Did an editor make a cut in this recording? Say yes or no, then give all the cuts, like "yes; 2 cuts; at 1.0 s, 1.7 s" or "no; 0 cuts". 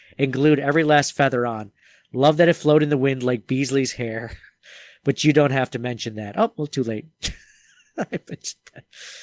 no; 0 cuts